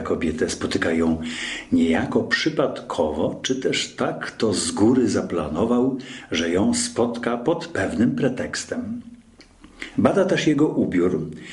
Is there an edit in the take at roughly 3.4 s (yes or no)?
no